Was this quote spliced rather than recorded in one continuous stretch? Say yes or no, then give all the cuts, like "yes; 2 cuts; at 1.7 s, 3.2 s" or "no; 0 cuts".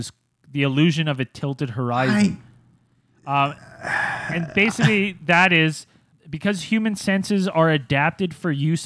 no; 0 cuts